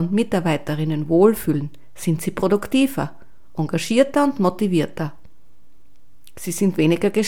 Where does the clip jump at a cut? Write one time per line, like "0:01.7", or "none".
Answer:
none